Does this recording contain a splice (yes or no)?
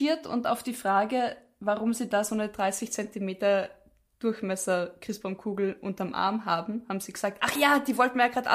yes